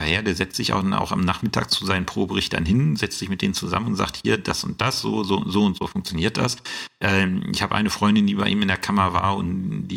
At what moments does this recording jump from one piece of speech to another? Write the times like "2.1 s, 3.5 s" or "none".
none

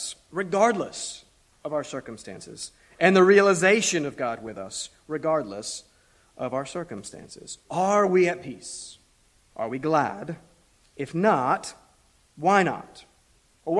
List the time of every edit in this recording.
none

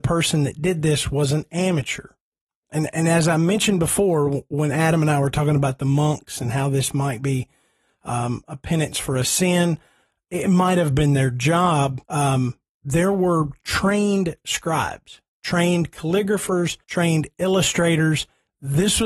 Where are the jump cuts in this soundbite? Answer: 12.0 s, 16.8 s

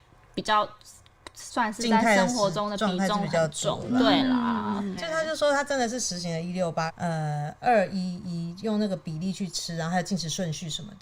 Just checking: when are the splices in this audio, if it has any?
5.0 s, 6.9 s

